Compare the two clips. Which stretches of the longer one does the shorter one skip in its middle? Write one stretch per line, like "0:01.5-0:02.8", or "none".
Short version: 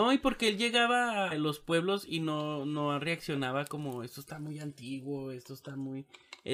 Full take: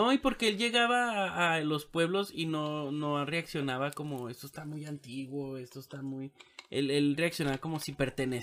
0:01.3-0:01.6